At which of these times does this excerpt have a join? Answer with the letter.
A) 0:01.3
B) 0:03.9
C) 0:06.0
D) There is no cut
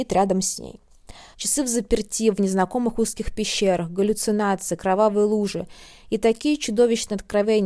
A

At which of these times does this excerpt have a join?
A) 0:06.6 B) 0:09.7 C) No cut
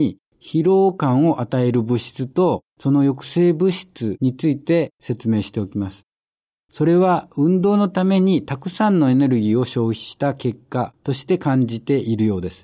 A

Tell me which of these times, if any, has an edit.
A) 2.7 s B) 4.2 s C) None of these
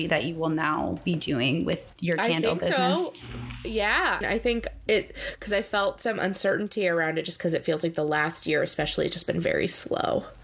B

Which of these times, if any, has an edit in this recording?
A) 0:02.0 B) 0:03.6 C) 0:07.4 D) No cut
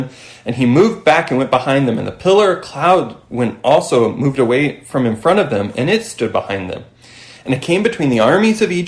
D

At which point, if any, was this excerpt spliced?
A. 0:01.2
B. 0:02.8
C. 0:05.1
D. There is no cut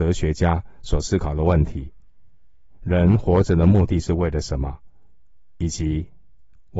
B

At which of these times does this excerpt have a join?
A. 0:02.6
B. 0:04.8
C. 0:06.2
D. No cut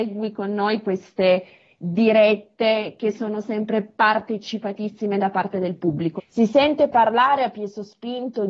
C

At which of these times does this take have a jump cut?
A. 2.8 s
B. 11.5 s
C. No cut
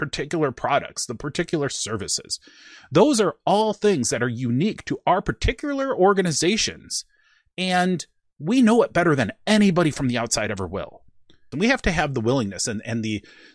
B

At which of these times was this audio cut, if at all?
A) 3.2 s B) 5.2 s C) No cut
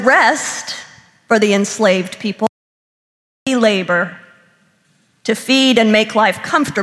C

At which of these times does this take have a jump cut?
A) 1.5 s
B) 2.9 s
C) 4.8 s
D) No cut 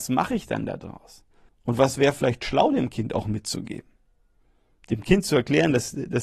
A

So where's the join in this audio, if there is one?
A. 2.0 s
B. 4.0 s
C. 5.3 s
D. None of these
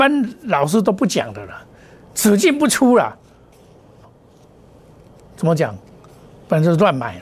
B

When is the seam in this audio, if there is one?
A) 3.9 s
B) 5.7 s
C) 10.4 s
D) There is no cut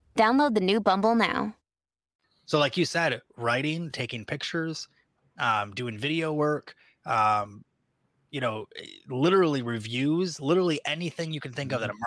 D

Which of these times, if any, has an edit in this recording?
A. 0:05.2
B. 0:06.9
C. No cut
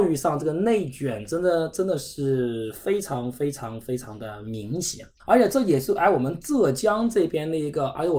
A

